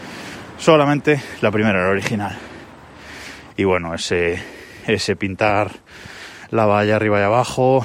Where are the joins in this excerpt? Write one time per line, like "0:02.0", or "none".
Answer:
0:03.5

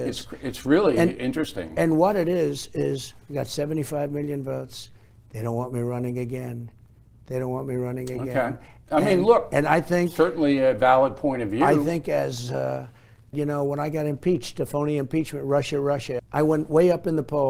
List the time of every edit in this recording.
0:13.3
0:16.2

